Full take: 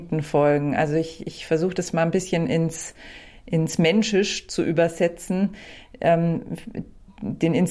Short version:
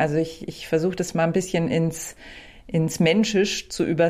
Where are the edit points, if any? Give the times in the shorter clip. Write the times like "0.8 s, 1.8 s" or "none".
none